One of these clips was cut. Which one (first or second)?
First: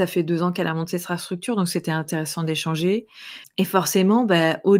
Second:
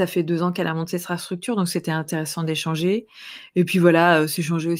first